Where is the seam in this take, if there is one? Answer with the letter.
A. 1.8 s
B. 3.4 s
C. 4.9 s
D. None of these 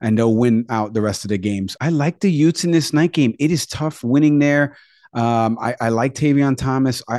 A